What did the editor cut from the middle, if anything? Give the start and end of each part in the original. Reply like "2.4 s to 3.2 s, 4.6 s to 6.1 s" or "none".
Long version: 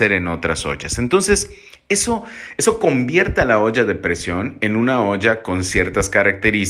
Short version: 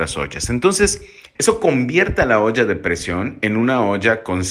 1.8 s to 2.5 s